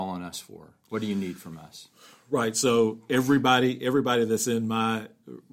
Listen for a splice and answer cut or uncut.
uncut